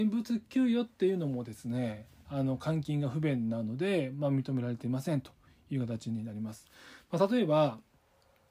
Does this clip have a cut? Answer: no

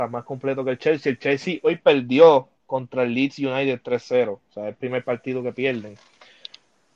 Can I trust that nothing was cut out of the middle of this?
yes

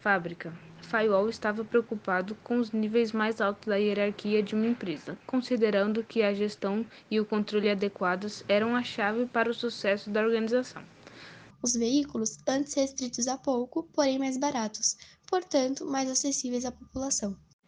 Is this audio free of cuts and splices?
no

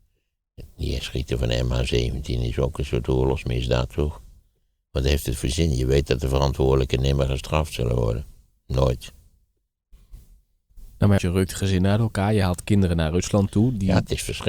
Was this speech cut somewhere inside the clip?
yes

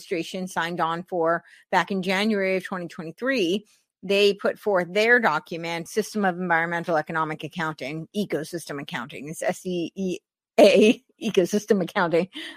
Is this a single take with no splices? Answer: no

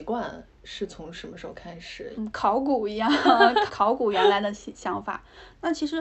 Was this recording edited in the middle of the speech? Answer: yes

